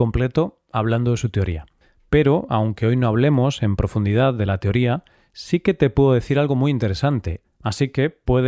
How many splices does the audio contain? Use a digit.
1